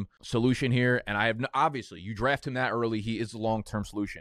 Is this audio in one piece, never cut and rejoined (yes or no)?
yes